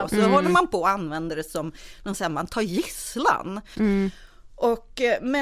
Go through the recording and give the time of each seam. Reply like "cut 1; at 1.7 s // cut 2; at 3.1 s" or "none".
cut 1; at 3.7 s